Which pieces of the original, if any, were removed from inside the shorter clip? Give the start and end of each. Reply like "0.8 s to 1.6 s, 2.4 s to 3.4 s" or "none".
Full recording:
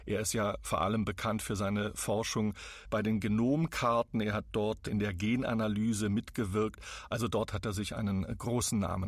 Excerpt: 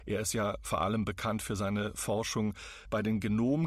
none